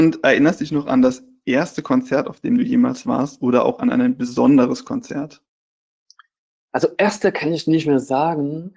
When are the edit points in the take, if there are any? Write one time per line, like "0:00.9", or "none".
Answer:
none